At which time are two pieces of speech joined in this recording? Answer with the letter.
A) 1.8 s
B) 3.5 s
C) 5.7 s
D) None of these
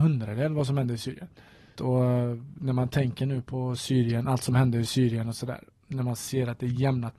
A